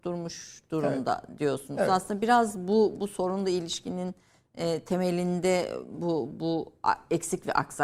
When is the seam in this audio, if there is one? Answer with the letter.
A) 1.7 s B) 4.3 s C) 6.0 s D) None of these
D